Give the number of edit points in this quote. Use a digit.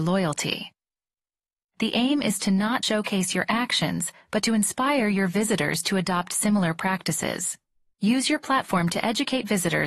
3